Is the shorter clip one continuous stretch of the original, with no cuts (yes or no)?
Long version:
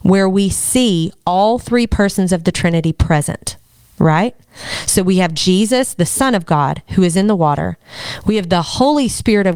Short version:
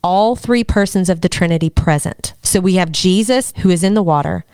no